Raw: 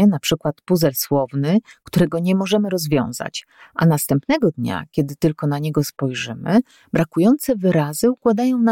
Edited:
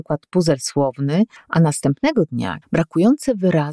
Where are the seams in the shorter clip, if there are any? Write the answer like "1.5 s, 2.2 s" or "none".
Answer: 1.4 s, 2.6 s